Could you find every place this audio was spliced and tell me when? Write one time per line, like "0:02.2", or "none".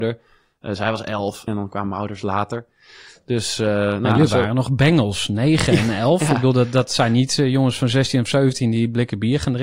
0:01.5